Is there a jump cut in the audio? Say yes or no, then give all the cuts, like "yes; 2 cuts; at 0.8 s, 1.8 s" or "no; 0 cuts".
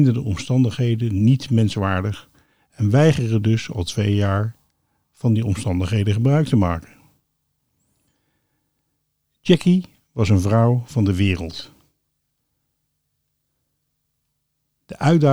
no; 0 cuts